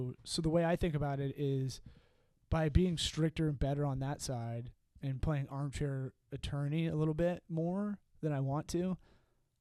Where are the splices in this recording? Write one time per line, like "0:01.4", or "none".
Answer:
none